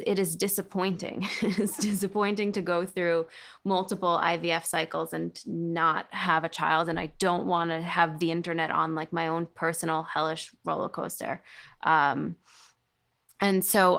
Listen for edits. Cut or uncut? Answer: uncut